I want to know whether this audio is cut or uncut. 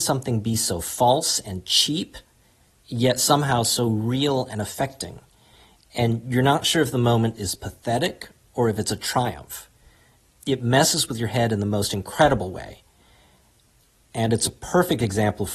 uncut